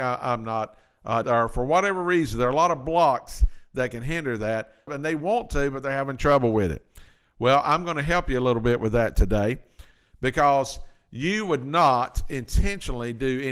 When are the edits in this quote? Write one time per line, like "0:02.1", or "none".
0:01.2
0:04.9